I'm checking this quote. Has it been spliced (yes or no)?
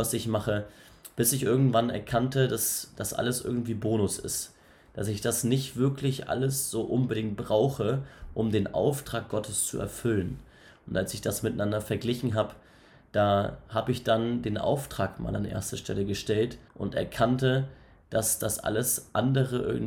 yes